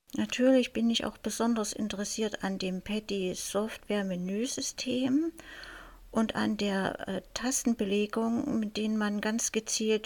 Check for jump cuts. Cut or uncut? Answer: uncut